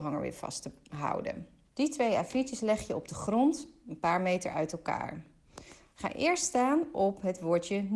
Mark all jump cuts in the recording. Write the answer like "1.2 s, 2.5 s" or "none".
1.7 s